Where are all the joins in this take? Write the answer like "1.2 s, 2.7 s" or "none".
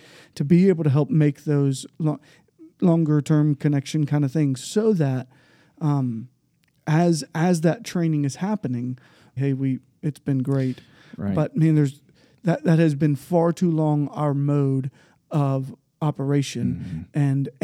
9.4 s